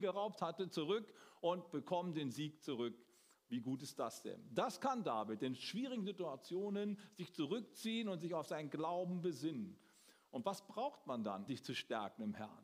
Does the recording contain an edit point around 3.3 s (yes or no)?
no